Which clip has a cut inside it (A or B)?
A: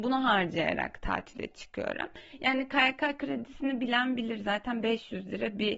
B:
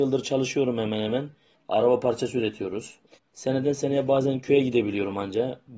B